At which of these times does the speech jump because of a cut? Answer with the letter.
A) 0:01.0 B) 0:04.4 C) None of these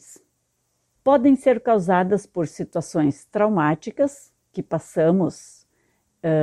A